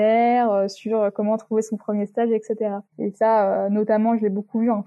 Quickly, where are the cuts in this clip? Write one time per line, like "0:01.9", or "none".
0:02.9

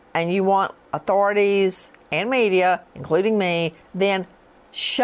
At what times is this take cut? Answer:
0:03.8

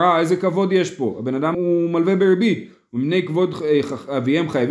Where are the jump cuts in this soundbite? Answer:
0:01.5

